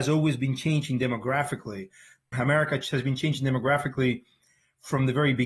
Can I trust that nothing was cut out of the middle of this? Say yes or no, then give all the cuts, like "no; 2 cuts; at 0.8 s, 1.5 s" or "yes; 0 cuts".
yes; 0 cuts